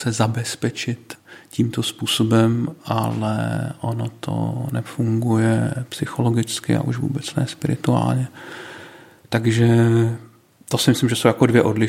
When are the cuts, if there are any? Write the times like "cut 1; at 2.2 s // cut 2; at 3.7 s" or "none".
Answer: none

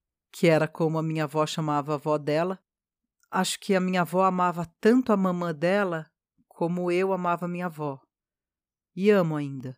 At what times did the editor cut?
none

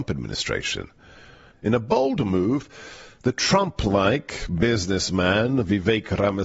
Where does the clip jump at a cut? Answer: cut 1; at 1.5 s

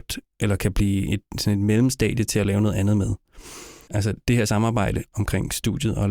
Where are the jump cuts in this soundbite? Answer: cut 1; at 3.9 s

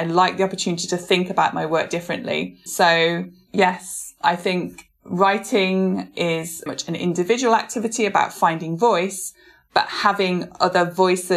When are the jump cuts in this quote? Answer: cut 1; at 2.7 s // cut 2; at 6.7 s

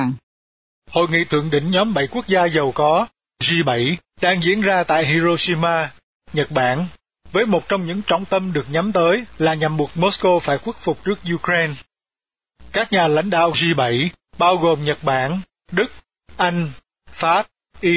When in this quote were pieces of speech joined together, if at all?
cut 1; at 15.7 s

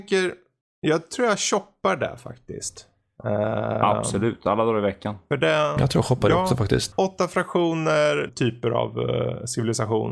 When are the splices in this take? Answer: cut 1; at 6.9 s // cut 2; at 8.3 s

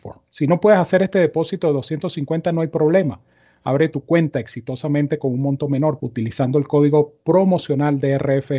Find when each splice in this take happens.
cut 1; at 6.0 s

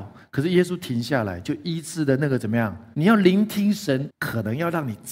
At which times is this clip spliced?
cut 1; at 2.9 s // cut 2; at 4.1 s

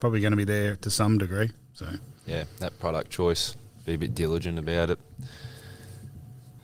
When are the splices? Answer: none

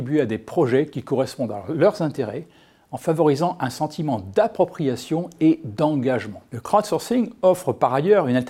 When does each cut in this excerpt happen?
cut 1; at 6.5 s

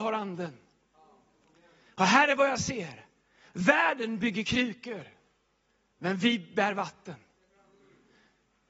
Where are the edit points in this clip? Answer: none

